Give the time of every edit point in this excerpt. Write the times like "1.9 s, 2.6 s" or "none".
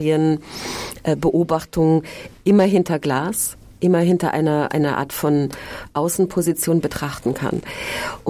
none